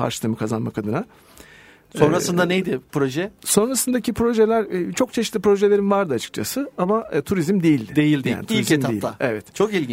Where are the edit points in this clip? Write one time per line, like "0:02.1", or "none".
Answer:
none